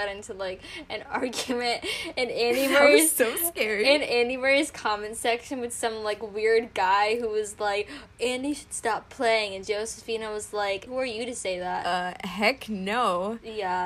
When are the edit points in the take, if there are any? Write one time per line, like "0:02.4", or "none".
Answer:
0:10.9